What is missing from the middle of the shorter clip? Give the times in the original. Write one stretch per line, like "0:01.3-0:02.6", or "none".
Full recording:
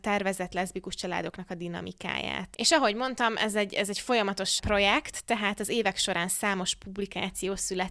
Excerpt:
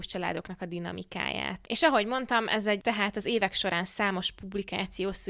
0:03.7-0:05.2